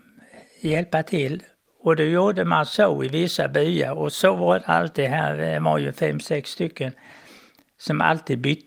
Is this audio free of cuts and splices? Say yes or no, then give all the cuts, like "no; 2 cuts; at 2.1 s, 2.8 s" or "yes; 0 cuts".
yes; 0 cuts